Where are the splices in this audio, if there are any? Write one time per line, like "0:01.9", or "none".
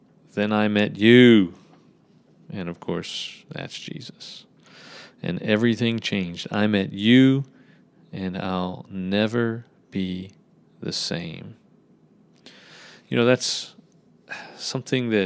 none